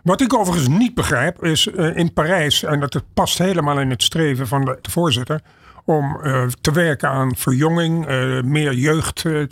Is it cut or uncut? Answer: cut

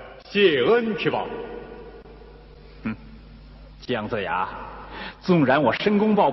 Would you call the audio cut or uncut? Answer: uncut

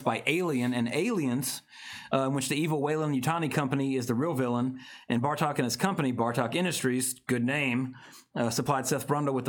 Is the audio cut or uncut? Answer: uncut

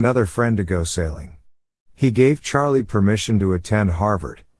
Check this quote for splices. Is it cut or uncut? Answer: cut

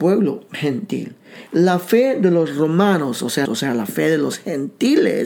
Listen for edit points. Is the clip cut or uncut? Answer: cut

